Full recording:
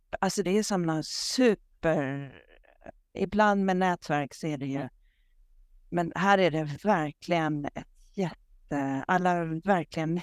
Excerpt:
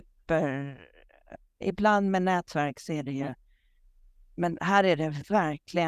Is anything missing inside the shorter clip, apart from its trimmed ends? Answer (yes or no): no